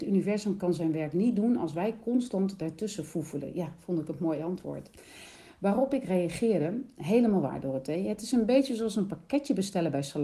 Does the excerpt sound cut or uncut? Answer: uncut